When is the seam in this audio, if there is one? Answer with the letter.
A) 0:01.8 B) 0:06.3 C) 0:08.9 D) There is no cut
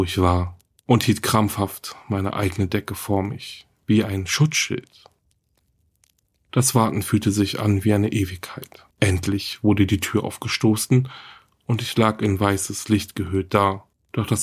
C